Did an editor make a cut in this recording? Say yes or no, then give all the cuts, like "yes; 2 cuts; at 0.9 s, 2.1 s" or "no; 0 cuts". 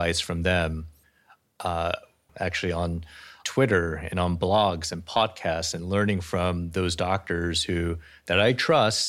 yes; 1 cut; at 2.3 s